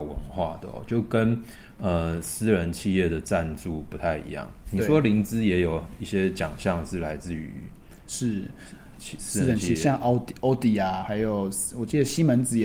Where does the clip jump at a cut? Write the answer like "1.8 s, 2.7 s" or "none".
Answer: 9.2 s, 11.0 s